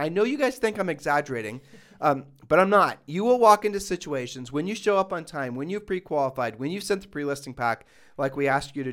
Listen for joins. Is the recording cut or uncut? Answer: uncut